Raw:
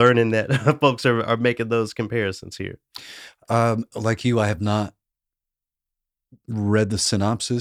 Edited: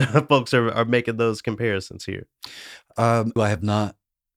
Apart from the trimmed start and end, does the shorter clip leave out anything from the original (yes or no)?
yes